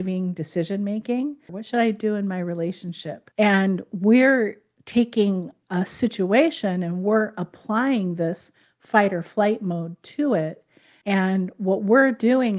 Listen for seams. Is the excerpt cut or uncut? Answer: cut